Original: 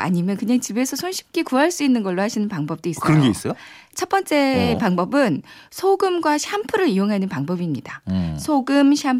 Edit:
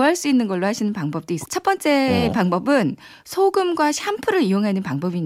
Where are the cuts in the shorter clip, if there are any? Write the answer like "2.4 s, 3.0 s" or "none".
1.4 s